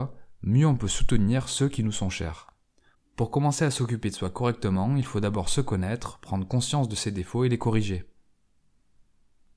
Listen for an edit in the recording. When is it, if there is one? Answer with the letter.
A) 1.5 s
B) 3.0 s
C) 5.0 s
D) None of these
D